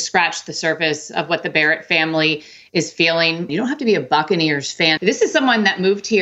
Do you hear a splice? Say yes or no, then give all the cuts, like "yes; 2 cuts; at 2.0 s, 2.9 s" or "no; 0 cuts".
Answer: yes; 2 cuts; at 3.5 s, 5.0 s